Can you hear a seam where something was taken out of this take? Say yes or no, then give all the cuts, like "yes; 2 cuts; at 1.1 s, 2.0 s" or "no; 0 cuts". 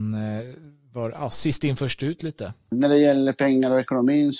yes; 1 cut; at 2.7 s